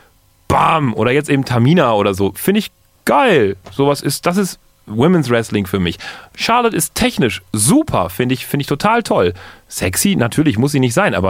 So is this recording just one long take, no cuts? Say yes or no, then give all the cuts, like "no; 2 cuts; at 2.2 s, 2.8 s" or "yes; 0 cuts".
yes; 0 cuts